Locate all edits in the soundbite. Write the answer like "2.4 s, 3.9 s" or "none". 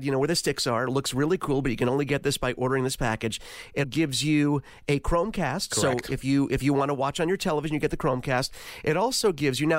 3.8 s